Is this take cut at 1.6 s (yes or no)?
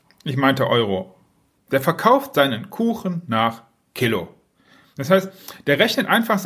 yes